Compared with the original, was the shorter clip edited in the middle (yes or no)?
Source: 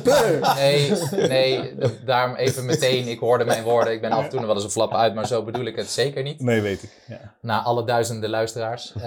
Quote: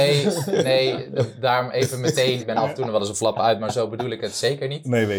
yes